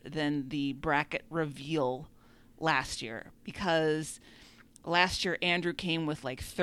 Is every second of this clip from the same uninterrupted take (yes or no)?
yes